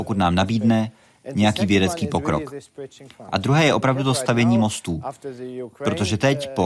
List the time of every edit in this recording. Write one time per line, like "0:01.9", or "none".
none